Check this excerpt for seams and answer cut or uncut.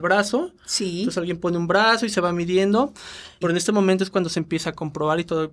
cut